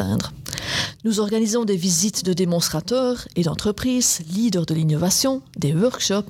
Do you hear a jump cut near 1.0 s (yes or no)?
yes